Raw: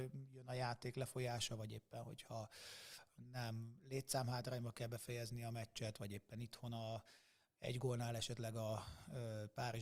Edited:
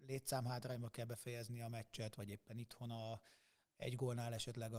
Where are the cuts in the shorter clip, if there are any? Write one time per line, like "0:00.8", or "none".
none